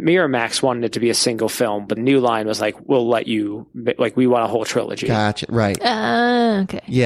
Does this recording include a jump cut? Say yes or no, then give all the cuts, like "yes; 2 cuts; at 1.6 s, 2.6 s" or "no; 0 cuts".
yes; 1 cut; at 2.0 s